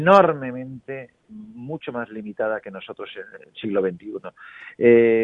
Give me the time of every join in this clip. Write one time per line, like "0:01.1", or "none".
none